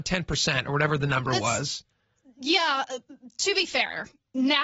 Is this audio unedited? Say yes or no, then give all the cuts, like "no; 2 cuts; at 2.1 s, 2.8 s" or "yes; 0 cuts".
yes; 0 cuts